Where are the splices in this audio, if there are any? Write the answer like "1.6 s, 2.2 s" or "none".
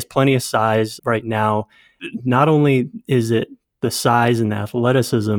1.0 s